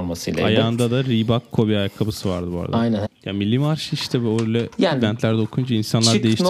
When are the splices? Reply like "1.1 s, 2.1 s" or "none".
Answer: 3.0 s